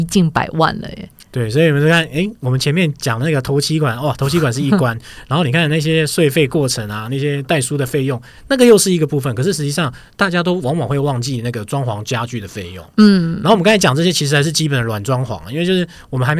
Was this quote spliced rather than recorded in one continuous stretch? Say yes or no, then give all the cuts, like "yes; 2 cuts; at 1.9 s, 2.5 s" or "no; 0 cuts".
no; 0 cuts